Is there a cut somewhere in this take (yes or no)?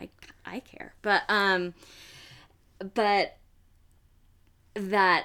no